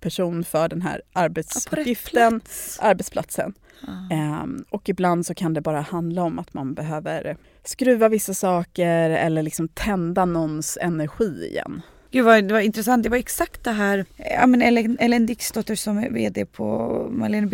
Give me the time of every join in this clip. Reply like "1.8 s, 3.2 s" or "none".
none